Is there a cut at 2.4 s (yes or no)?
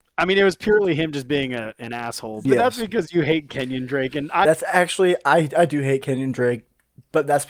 yes